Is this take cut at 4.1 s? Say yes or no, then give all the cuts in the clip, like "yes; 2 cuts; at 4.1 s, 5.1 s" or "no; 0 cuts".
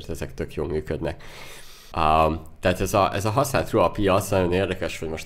no; 1 cut; at 1.9 s